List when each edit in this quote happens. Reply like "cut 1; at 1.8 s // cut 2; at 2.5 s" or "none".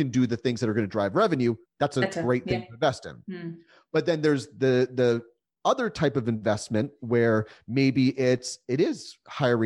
none